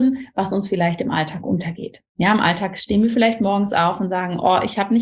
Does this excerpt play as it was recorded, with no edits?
yes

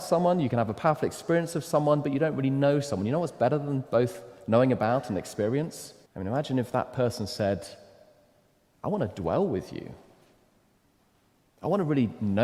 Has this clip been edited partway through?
yes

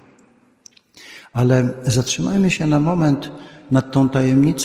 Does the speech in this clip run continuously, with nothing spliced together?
yes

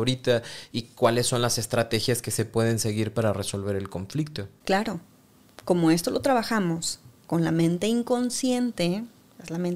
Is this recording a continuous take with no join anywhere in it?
yes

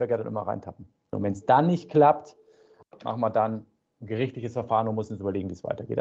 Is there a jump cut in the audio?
yes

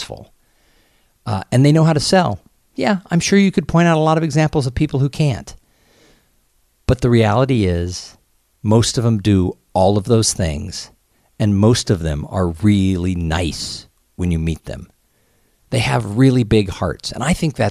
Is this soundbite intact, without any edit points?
yes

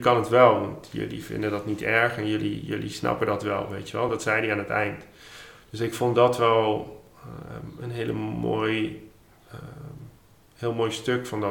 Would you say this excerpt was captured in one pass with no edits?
yes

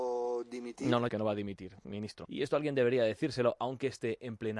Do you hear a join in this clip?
yes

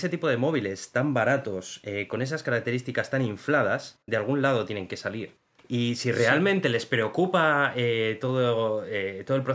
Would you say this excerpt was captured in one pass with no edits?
yes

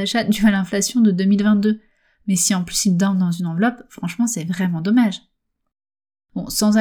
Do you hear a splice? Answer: no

